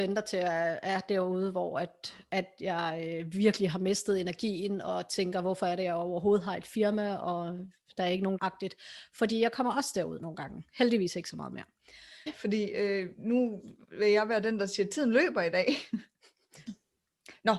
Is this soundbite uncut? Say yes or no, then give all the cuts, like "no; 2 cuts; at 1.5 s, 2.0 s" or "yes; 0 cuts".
no; 3 cuts; at 8.4 s, 12.3 s, 16.7 s